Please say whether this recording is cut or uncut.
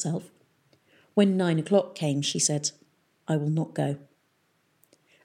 uncut